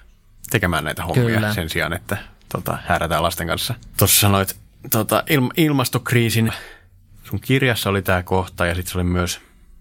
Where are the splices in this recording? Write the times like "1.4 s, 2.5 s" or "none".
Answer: 3.9 s, 6.5 s